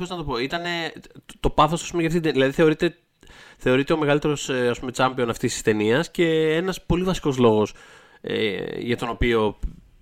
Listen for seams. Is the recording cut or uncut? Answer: uncut